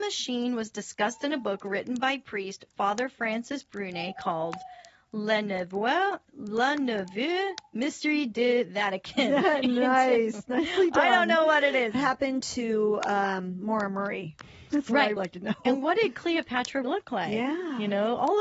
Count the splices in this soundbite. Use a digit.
3